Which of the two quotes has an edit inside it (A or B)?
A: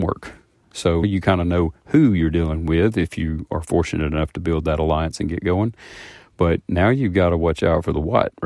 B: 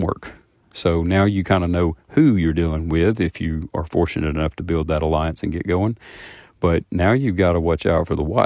A